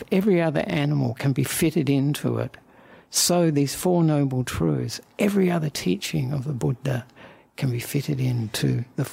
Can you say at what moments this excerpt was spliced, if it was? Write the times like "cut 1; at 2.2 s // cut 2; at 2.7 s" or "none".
none